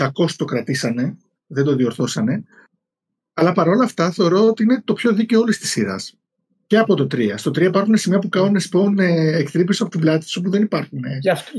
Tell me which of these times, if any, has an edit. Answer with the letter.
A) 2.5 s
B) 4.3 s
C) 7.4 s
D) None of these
D